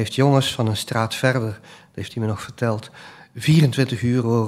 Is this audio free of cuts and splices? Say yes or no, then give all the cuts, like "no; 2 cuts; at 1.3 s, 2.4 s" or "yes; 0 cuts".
yes; 0 cuts